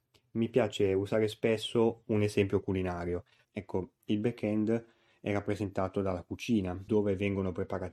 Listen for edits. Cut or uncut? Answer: cut